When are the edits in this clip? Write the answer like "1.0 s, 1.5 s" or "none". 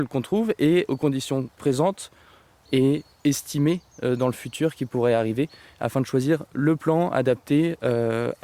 none

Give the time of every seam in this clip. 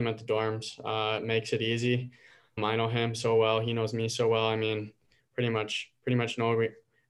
none

